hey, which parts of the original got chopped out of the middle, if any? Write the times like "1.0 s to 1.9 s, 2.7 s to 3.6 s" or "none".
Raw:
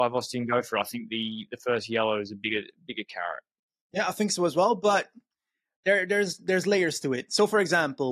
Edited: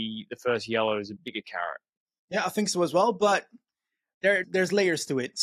2.4 s to 2.8 s, 6.1 s to 6.4 s